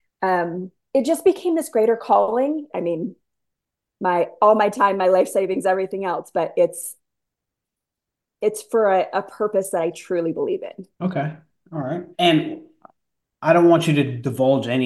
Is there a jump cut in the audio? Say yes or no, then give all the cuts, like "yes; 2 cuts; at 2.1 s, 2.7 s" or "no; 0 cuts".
yes; 3 cuts; at 2.7 s, 10.9 s, 12.1 s